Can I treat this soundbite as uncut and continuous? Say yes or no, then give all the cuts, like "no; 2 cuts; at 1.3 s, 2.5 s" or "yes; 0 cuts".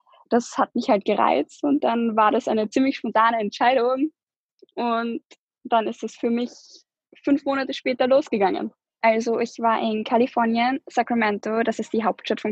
no; 1 cut; at 9.0 s